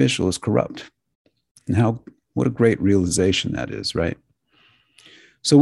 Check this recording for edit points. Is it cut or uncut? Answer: uncut